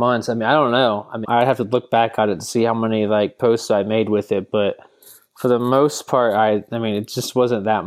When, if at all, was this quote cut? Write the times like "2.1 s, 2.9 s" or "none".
1.2 s